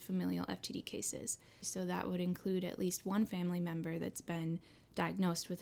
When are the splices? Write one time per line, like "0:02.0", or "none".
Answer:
0:01.6